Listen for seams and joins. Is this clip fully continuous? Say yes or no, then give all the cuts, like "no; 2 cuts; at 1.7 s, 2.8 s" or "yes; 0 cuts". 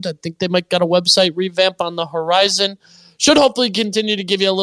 yes; 0 cuts